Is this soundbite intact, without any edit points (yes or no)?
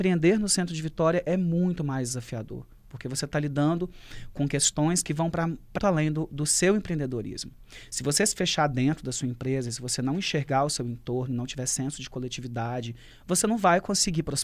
no